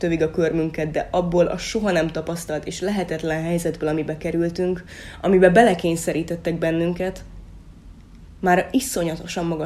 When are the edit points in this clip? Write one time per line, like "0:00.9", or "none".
none